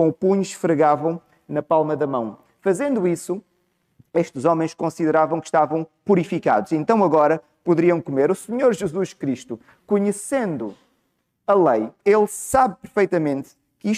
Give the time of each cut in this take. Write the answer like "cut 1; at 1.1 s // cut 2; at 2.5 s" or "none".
cut 1; at 12.0 s